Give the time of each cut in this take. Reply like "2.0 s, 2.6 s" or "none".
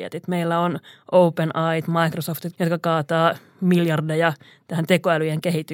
2.5 s